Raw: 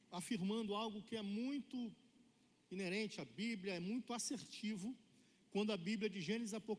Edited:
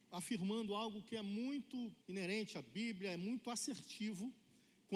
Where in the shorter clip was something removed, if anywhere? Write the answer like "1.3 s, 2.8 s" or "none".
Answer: 2.0 s